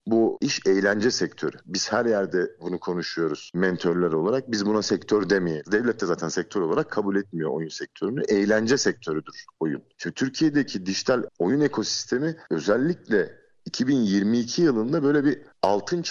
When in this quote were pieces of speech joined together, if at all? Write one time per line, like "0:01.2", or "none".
0:05.6